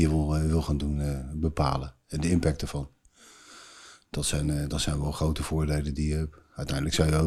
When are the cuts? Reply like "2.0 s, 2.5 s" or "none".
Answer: none